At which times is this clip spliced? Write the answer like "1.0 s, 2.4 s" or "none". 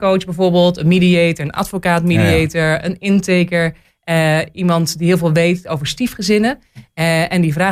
none